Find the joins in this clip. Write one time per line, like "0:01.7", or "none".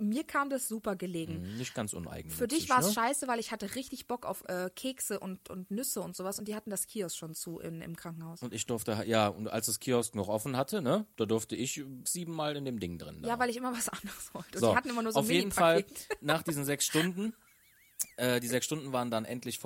0:12.1

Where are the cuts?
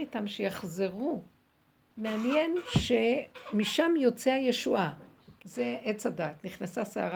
0:01.9
0:05.4

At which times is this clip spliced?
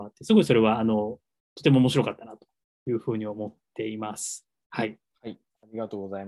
0:05.1

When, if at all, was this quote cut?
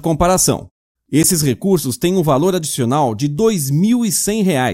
0:01.0

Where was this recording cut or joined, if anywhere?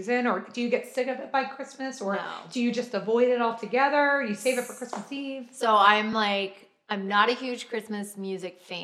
none

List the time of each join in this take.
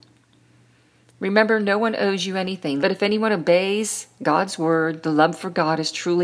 0:02.8

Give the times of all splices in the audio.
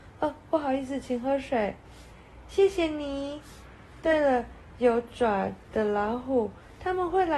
none

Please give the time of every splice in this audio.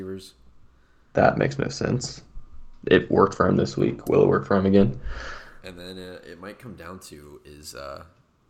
none

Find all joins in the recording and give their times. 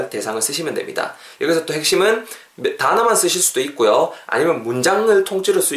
none

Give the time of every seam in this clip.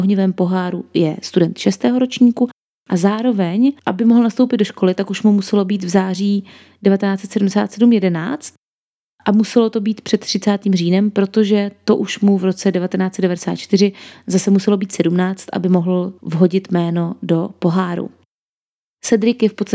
none

